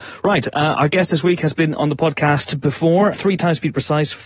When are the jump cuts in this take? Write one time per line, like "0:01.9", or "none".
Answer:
0:03.1